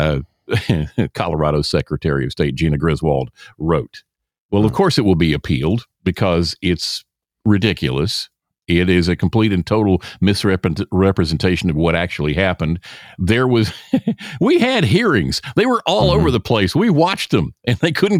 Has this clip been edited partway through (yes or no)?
no